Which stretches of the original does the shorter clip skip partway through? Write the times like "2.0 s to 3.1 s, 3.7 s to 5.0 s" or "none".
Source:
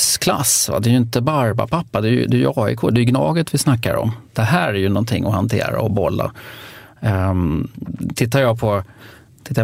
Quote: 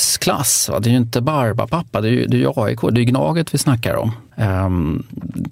4.3 s to 6.9 s